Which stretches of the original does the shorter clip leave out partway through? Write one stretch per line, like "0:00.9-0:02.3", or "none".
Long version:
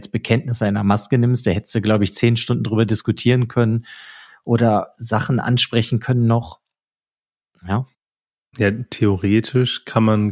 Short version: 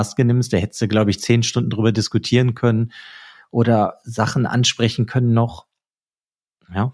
none

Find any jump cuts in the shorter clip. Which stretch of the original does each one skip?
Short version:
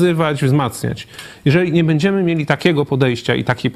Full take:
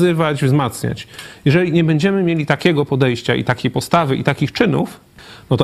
none

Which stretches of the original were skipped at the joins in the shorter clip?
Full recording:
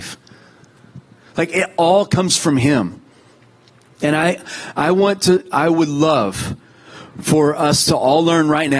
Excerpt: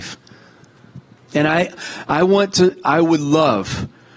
0:01.2-0:03.9

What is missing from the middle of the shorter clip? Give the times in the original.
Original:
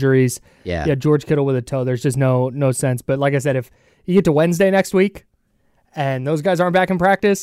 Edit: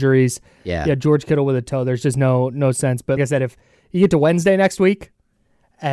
0:03.2-0:03.3

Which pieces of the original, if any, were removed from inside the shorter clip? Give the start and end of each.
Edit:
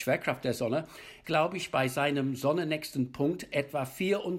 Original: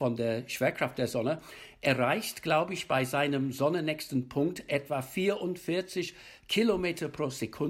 0:01.8-0:02.4

